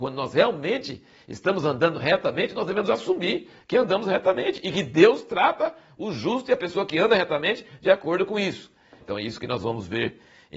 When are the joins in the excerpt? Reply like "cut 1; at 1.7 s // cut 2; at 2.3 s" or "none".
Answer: cut 1; at 9.0 s